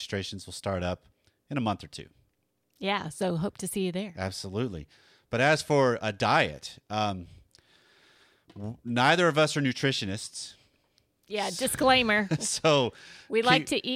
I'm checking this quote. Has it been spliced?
no; 0 cuts

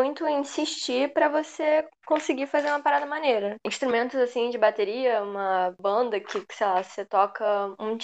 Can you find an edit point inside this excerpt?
no; 0 cuts

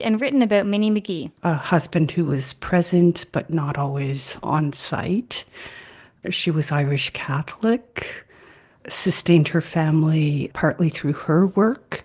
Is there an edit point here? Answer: no; 0 cuts

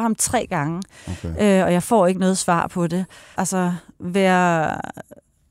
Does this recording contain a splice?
yes; 1 cut; at 3.4 s

